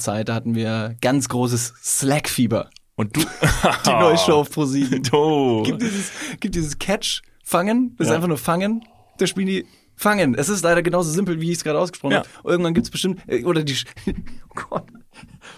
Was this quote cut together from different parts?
no; 0 cuts

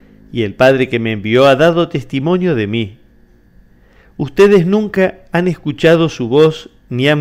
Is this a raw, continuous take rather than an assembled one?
yes; 0 cuts

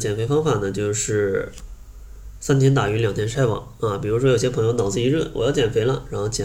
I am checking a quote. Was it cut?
no; 0 cuts

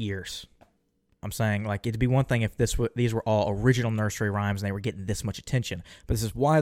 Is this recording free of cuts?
no; 1 cut; at 1.2 s

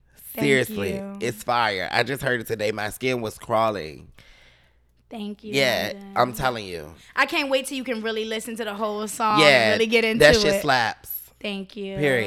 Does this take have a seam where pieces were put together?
no; 0 cuts

